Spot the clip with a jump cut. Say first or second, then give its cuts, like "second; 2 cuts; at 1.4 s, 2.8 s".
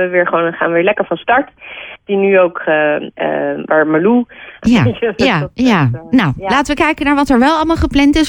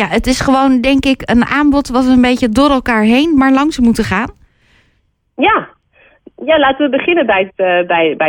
first; 2 cuts; at 2.0 s, 4.6 s